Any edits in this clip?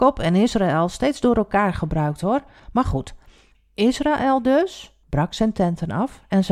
yes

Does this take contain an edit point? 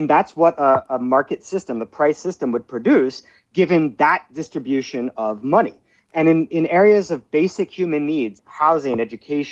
yes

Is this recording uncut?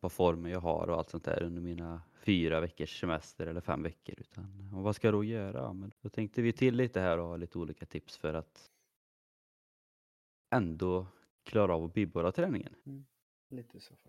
no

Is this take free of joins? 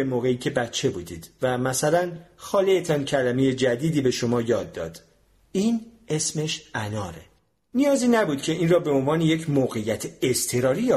yes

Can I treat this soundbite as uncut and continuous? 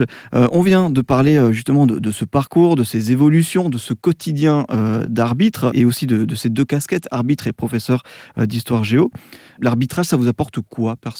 yes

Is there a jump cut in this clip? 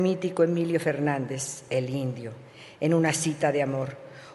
no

